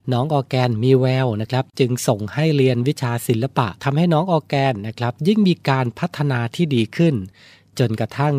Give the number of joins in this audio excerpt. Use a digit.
1